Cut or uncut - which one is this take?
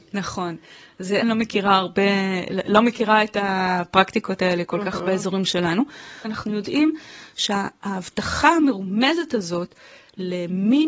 cut